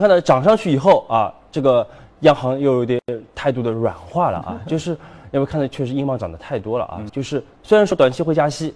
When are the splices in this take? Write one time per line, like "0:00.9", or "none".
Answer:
0:07.1